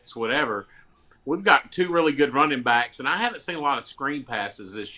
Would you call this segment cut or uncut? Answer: uncut